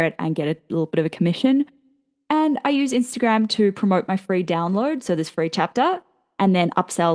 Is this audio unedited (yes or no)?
yes